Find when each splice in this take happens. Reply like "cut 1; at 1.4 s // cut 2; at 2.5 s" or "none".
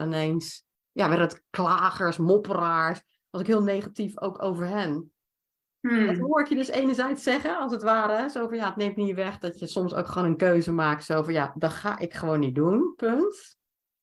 none